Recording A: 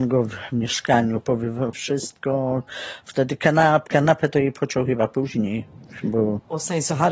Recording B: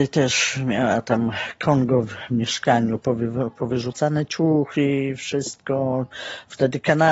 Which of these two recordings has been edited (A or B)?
A